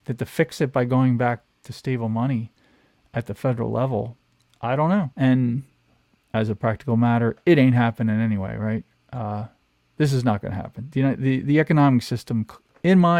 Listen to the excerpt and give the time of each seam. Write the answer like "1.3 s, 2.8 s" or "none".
5.1 s